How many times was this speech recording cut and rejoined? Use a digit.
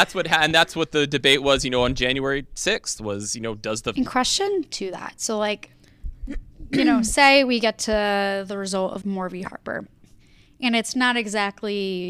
2